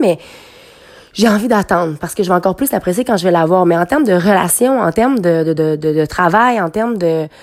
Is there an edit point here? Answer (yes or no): no